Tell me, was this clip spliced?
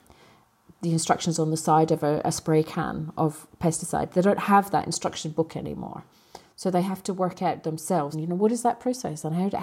yes; 1 cut; at 8.1 s

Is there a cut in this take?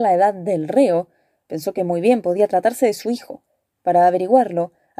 no; 0 cuts

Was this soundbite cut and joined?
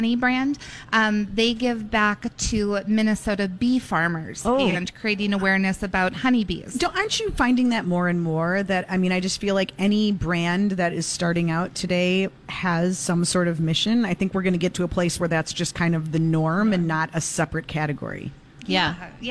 no; 0 cuts

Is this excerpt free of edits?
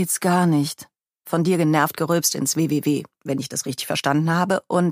yes; 0 cuts

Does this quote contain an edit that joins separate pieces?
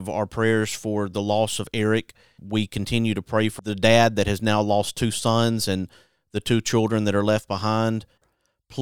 no; 0 cuts

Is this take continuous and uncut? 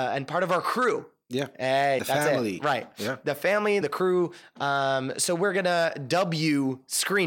no; 2 cuts; at 2.0 s, 3.8 s

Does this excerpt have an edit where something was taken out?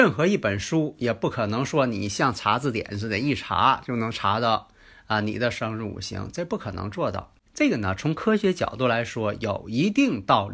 yes; 1 cut; at 7.5 s

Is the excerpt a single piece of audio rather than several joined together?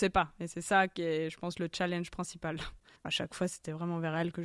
no; 1 cut; at 2.9 s

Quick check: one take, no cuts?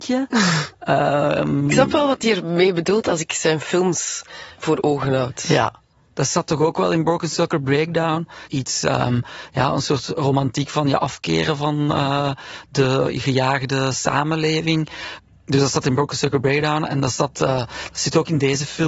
no; 1 cut; at 8.5 s

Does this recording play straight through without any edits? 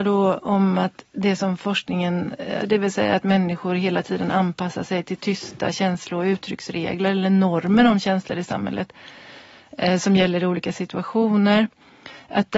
no; 1 cut; at 2.6 s

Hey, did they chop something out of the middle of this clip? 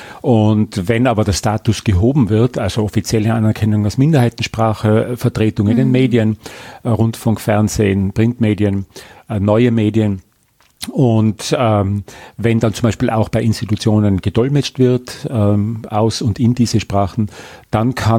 no; 0 cuts

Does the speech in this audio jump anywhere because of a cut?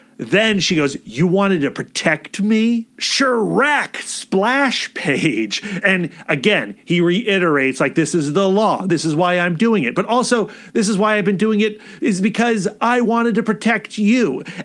yes; 1 cut; at 5.8 s

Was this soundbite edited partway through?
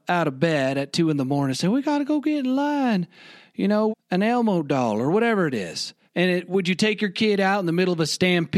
yes; 2 cuts; at 3.9 s, 6.1 s

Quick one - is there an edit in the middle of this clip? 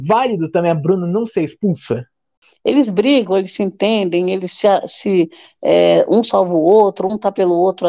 no; 0 cuts

